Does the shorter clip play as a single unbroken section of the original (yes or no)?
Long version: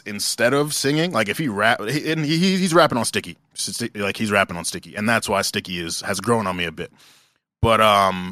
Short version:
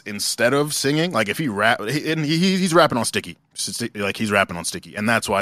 yes